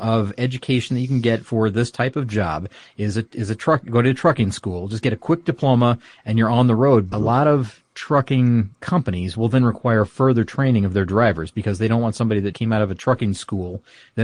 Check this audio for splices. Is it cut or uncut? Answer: cut